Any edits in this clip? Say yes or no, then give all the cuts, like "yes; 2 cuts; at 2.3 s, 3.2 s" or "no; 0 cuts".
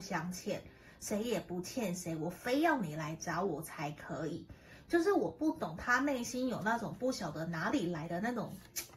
no; 0 cuts